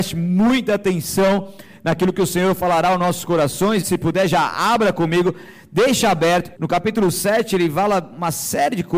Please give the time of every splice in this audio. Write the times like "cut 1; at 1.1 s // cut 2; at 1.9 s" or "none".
cut 1; at 3.8 s // cut 2; at 6.5 s